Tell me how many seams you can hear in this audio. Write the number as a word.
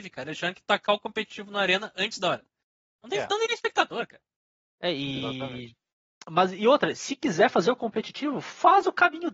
zero